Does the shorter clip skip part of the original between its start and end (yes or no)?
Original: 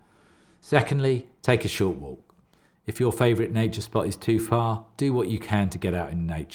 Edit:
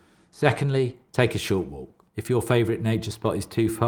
yes